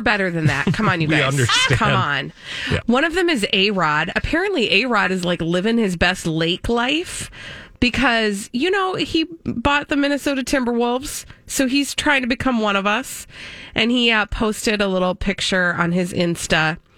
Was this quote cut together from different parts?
yes; 1 cut; at 2.8 s

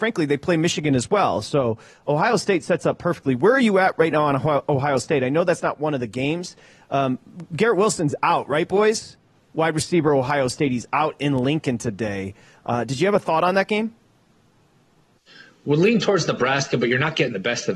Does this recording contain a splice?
no; 0 cuts

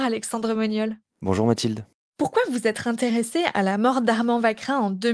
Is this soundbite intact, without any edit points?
yes; 0 cuts

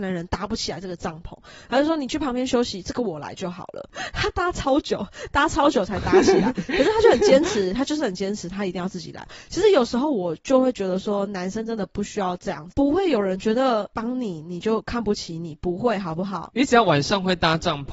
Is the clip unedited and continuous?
yes; 0 cuts

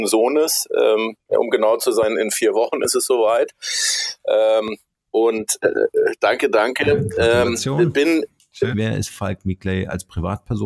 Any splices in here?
yes; 1 cut; at 8.7 s

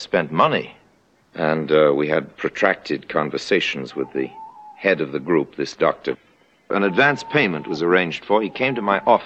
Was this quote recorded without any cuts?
no; 1 cut; at 1.2 s

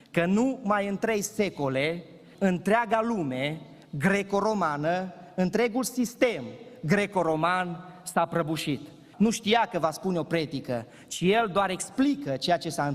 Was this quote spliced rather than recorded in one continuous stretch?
yes; 2 cuts; at 2.3 s, 9.1 s

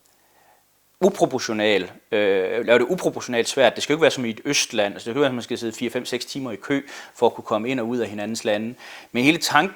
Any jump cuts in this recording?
no; 0 cuts

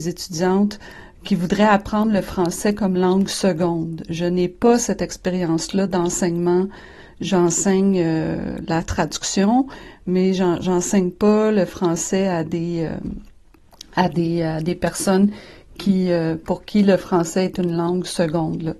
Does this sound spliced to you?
no; 0 cuts

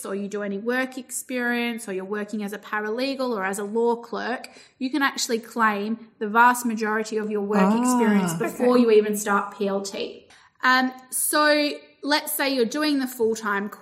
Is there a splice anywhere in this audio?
no; 0 cuts

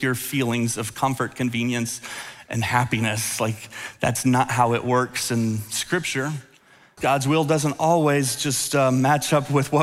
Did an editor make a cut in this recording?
yes; 1 cut; at 7.0 s

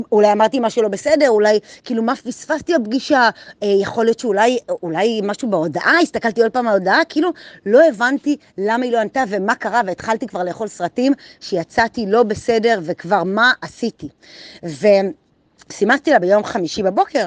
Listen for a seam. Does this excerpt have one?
no; 0 cuts

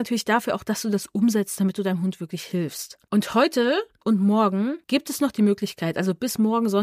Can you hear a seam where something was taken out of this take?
no; 0 cuts

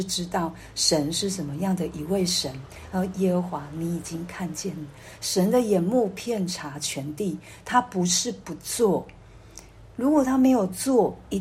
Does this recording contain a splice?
no; 0 cuts

